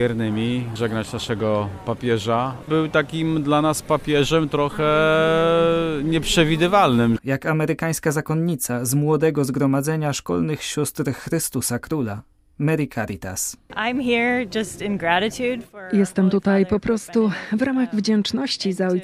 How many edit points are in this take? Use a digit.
1